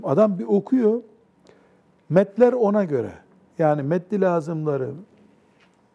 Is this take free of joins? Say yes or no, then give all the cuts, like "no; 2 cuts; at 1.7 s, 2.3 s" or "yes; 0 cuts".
yes; 0 cuts